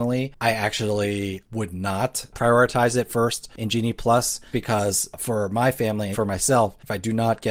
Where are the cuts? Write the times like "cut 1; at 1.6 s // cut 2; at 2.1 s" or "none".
cut 1; at 4.5 s // cut 2; at 6.1 s